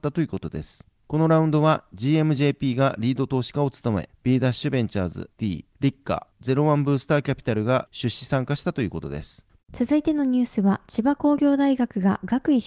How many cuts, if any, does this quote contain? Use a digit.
2